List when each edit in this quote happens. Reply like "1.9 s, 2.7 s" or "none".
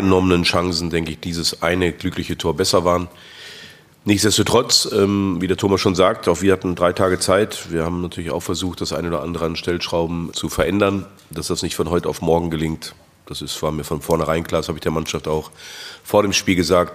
10.3 s